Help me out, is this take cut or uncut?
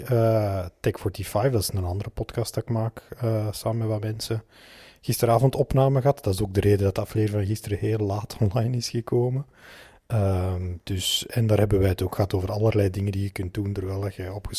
uncut